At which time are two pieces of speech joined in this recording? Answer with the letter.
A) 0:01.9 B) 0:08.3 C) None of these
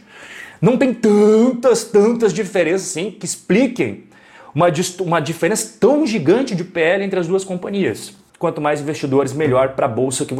B